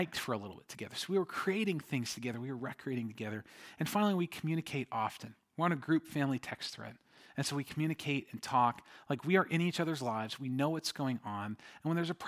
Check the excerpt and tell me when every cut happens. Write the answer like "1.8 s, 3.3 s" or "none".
none